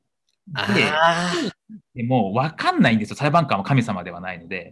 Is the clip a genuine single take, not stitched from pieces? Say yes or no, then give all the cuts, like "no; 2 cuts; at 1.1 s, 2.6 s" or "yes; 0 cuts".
yes; 0 cuts